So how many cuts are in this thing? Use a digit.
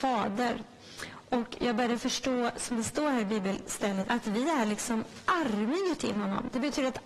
2